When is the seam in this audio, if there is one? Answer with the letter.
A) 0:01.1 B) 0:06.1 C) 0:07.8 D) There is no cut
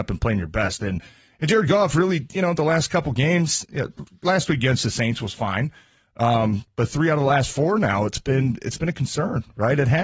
D